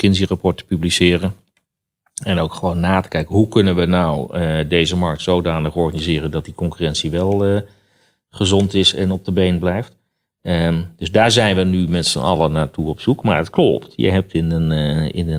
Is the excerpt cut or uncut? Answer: uncut